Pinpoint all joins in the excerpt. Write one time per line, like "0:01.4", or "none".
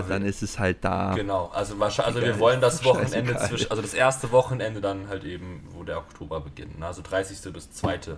none